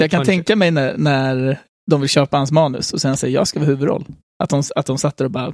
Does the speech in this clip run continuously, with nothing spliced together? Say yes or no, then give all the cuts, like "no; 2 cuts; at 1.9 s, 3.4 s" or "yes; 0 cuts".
yes; 0 cuts